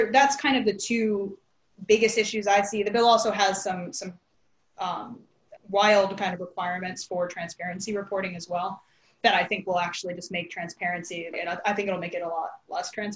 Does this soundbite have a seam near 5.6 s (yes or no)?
yes